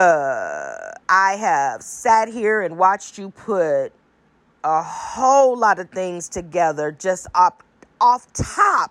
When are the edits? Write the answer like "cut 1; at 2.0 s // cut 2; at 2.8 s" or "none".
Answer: none